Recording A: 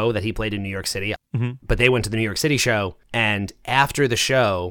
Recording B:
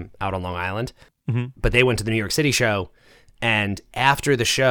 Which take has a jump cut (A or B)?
A